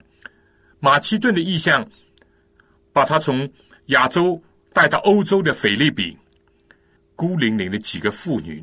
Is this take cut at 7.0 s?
yes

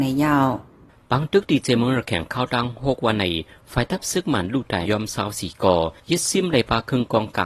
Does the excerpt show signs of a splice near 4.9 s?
yes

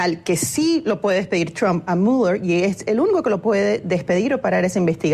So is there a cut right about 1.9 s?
yes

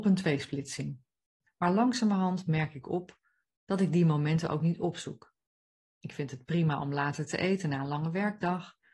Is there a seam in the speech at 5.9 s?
no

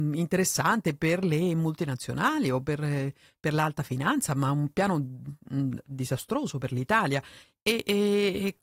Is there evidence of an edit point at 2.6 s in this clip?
no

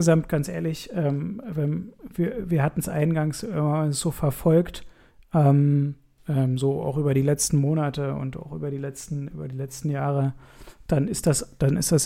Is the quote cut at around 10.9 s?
yes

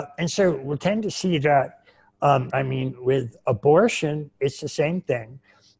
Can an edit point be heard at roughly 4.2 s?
no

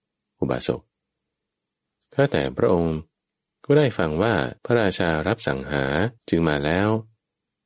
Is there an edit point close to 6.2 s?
yes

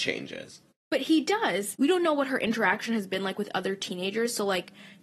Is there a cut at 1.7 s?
yes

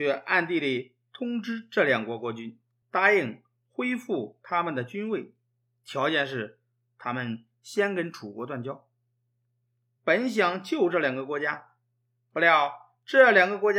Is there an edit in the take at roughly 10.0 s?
yes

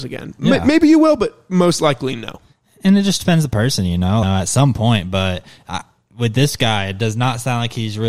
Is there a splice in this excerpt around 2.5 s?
no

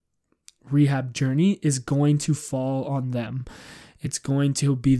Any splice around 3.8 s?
no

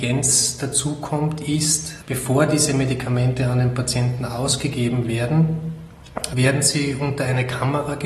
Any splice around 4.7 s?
no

